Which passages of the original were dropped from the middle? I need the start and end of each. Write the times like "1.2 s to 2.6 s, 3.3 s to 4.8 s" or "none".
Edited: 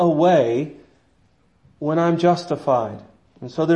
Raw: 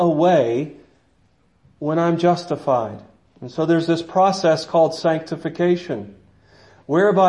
none